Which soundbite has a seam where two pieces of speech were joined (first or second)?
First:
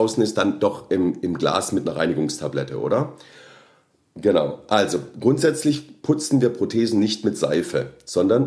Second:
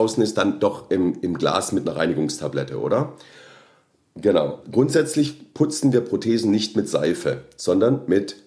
second